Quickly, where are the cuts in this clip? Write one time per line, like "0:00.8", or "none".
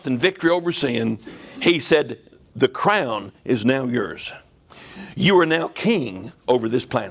none